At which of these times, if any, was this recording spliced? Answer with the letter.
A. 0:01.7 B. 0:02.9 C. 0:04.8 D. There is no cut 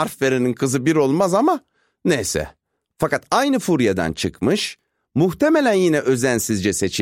B